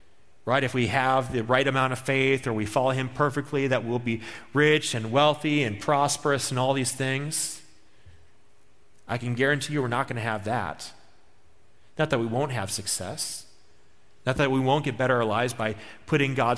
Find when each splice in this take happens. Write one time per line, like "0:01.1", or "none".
none